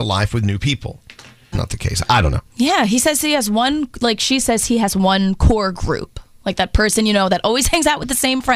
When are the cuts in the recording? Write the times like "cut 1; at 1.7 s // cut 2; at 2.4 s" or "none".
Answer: cut 1; at 1.5 s